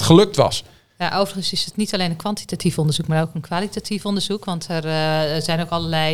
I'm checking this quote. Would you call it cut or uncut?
uncut